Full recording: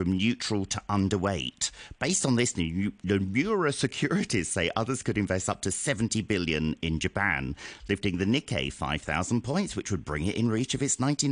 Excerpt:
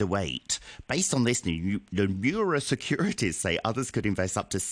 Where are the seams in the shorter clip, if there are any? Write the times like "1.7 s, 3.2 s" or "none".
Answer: none